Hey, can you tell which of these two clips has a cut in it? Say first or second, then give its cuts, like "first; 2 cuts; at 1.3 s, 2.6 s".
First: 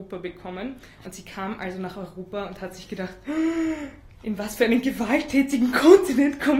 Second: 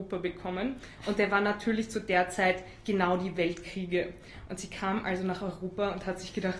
first; 1 cut; at 1.0 s